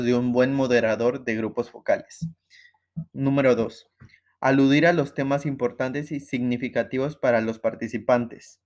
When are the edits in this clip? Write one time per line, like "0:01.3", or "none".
0:03.1

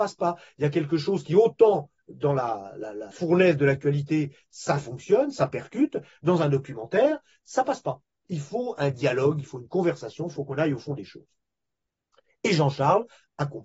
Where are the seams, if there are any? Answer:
0:03.1

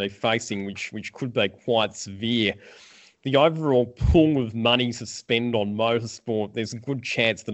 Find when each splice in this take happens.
none

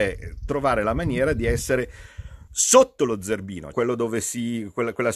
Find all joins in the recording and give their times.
0:02.5
0:03.7

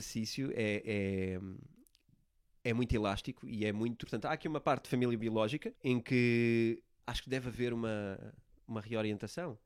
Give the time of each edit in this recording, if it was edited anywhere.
0:04.0
0:05.7
0:07.0

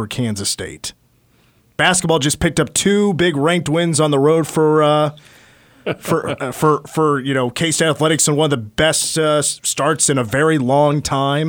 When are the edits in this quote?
none

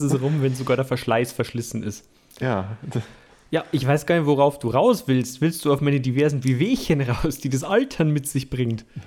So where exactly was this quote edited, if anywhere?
none

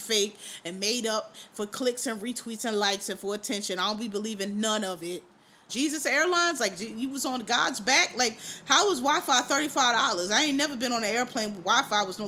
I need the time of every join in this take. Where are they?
0:05.7

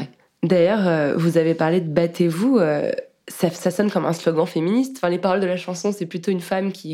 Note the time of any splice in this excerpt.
none

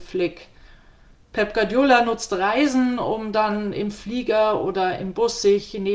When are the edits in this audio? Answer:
none

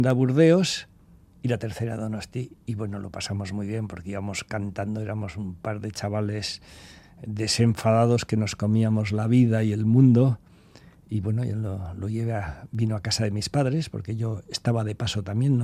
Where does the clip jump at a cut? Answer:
none

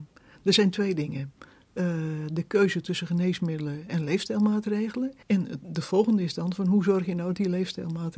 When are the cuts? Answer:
0:05.2

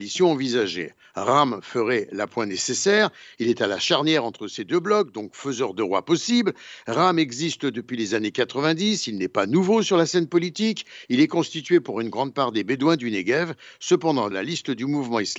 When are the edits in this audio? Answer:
0:14.3

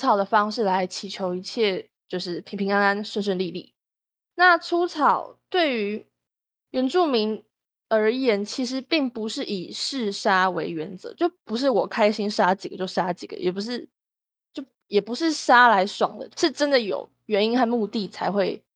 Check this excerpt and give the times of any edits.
0:16.3

